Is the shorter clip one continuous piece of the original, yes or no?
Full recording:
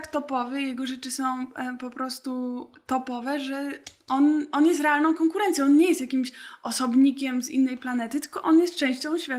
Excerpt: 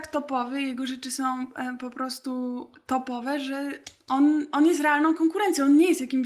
yes